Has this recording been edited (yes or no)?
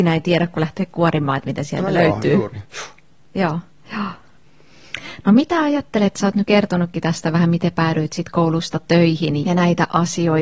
yes